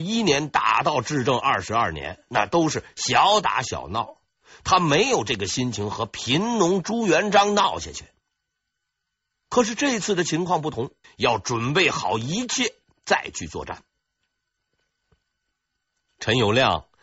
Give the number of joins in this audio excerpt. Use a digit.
1